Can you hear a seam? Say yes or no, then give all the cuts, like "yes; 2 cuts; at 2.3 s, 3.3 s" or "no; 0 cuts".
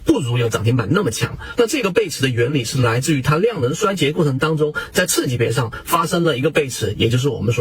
yes; 1 cut; at 1.6 s